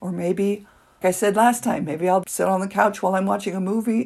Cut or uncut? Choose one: cut